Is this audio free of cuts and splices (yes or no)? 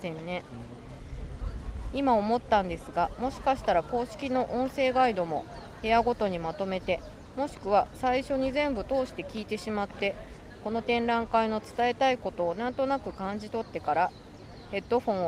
yes